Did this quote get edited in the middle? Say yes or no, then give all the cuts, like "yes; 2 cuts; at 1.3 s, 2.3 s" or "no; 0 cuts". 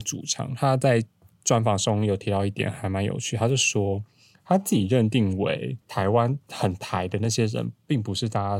yes; 1 cut; at 5.8 s